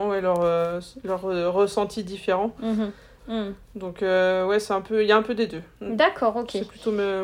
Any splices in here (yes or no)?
yes